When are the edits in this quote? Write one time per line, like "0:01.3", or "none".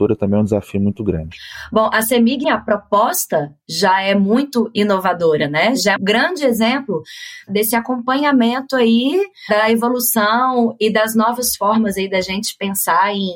0:02.4
0:06.0